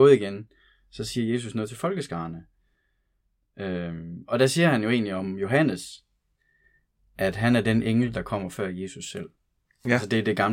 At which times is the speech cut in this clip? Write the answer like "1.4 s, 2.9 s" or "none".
none